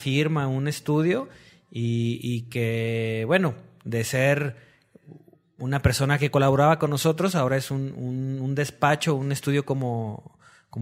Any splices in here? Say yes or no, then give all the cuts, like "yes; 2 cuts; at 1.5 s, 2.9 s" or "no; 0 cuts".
no; 0 cuts